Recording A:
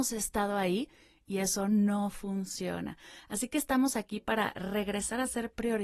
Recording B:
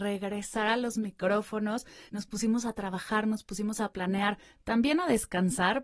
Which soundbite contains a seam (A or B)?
B